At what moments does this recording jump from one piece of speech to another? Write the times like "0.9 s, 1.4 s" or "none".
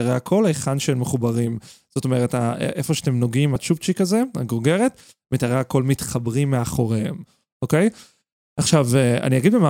3.6 s